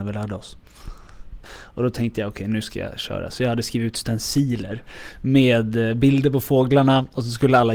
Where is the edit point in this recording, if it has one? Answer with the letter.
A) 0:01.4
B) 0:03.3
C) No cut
A